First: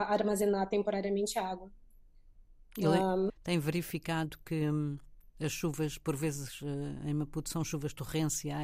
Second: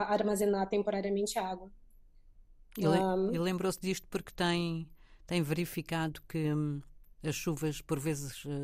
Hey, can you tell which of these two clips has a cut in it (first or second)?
first